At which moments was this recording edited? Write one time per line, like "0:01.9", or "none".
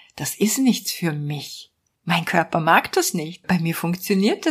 0:01.9
0:03.4